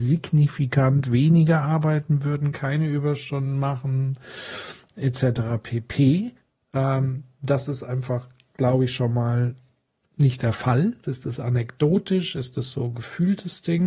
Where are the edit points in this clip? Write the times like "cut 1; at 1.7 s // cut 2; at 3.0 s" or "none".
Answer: cut 1; at 11.0 s